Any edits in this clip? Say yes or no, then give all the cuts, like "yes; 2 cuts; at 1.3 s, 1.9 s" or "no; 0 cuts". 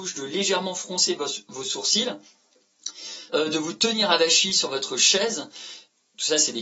no; 0 cuts